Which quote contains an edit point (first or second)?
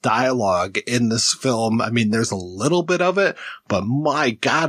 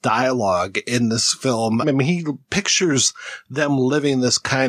second